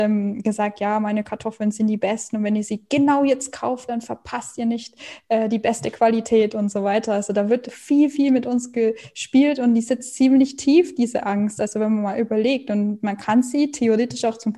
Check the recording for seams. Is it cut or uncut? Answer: uncut